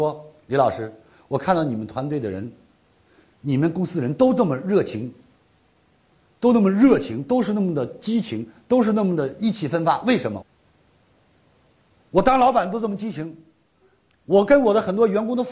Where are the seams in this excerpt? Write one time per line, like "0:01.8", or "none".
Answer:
0:10.4